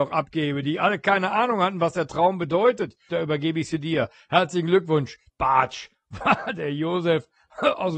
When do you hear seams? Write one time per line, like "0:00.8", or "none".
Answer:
0:03.1
0:05.3